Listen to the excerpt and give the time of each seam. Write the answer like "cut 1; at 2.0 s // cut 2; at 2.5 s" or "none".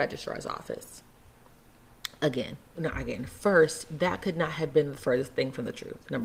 cut 1; at 2.8 s